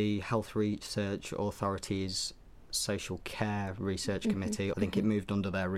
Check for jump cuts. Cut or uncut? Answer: cut